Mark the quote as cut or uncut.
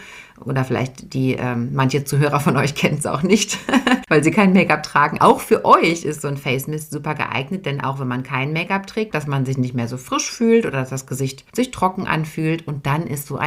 cut